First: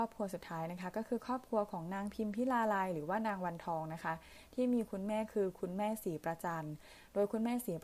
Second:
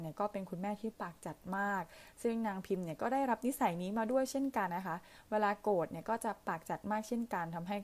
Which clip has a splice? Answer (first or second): second